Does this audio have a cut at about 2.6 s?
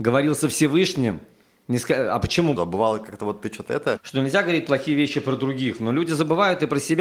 yes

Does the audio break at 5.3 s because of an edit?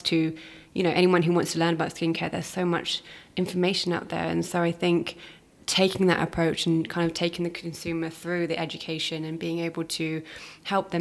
no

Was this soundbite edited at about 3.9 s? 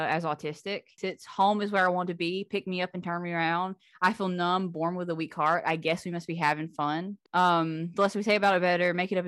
no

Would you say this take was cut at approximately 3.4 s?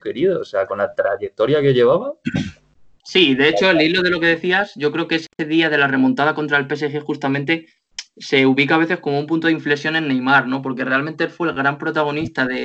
no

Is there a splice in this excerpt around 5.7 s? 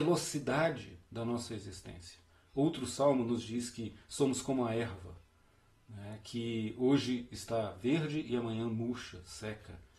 no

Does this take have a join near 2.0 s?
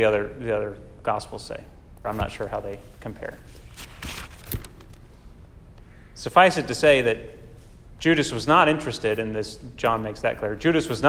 yes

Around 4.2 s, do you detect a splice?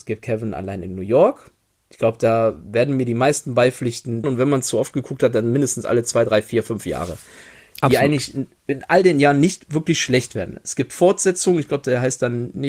yes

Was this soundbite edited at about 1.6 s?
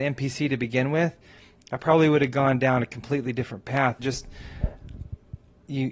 no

